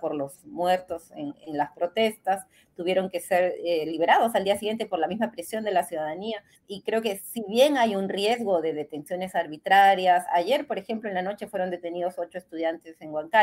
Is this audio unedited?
no; 1 cut; at 6.5 s

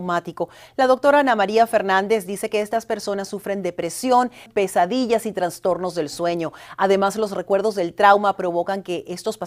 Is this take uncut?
no; 1 cut; at 4.5 s

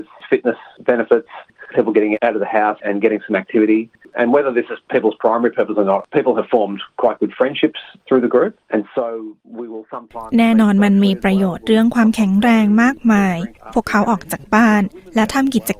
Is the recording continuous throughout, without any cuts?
yes; 0 cuts

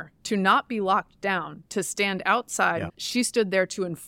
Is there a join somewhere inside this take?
yes; 1 cut; at 2.9 s

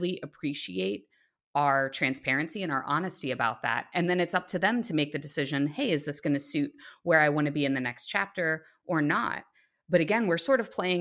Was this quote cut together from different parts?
no; 0 cuts

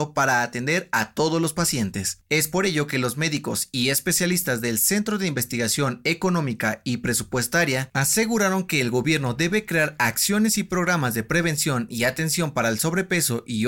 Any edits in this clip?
no; 0 cuts

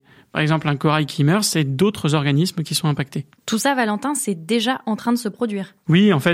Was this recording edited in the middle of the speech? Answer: no; 0 cuts

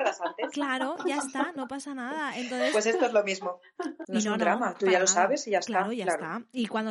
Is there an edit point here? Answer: yes; 1 cut; at 4.0 s

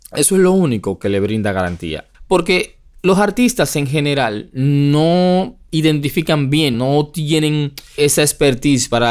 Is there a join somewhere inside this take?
yes; 3 cuts; at 2.1 s, 6.7 s, 8.0 s

